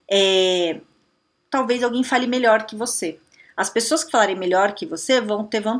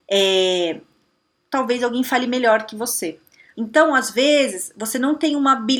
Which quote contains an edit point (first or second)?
second